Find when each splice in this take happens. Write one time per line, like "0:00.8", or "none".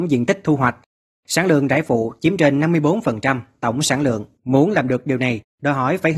0:04.4